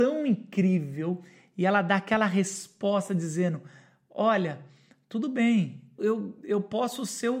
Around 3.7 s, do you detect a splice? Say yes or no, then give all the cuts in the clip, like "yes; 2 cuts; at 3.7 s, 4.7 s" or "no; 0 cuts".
no; 1 cut; at 6.0 s